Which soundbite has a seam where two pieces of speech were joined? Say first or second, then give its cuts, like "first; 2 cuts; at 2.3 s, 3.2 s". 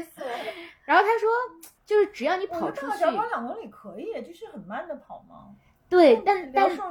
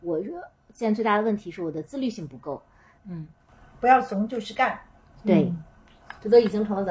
second; 1 cut; at 3.0 s